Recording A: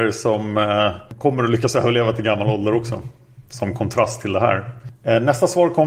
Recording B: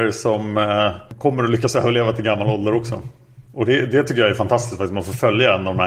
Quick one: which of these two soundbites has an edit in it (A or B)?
A